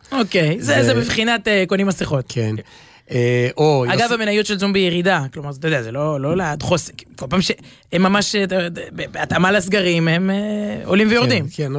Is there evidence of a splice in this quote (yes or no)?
yes